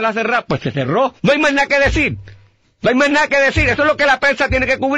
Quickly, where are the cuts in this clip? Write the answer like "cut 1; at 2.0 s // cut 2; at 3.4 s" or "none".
cut 1; at 1.2 s